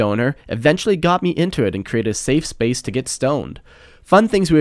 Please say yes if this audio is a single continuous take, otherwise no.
yes